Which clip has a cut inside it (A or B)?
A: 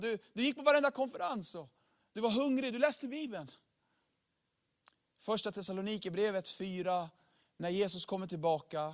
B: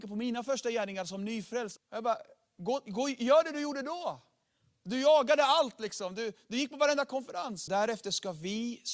B